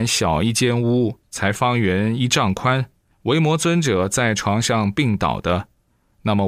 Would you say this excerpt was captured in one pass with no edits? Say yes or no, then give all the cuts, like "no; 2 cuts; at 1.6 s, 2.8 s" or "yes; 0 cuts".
yes; 0 cuts